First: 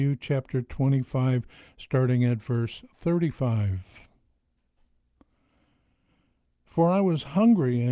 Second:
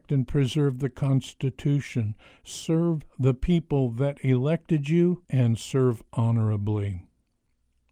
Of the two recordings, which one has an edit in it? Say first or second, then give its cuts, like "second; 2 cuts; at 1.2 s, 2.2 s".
second; 1 cut; at 5.2 s